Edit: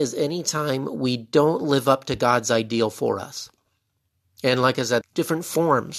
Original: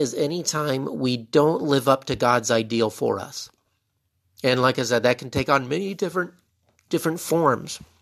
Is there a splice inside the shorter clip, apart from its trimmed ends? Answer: yes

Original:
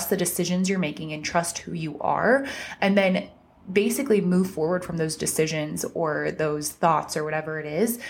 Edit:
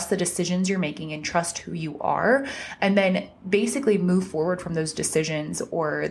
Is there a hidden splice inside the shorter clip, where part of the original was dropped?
yes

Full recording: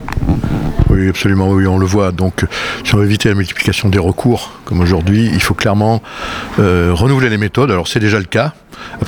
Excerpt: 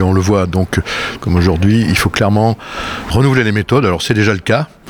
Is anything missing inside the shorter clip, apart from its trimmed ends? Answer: yes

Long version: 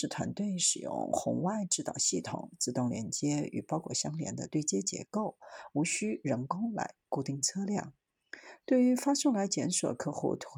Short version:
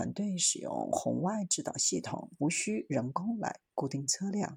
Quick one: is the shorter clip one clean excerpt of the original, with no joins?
no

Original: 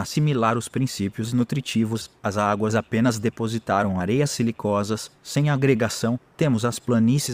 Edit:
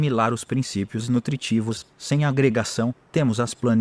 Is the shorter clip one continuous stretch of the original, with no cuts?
no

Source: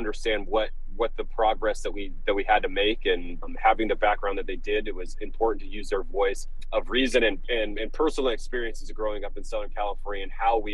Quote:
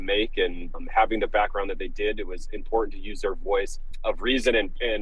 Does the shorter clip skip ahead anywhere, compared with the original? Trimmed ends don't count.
no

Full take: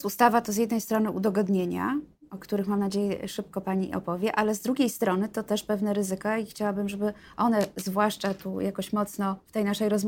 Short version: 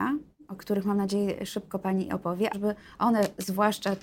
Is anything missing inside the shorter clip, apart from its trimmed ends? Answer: yes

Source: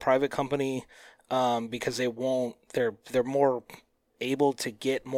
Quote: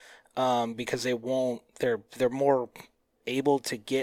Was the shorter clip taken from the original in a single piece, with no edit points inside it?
yes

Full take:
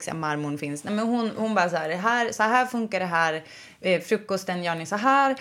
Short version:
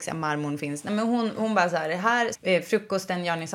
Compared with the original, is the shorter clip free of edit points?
no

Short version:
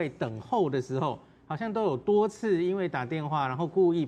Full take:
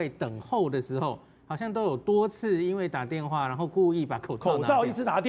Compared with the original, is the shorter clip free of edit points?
yes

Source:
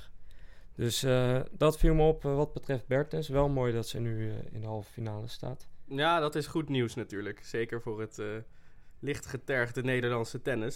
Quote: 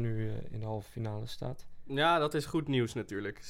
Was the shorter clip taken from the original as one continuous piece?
yes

